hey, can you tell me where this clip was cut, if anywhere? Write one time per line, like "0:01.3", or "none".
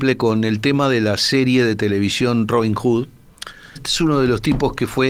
0:03.8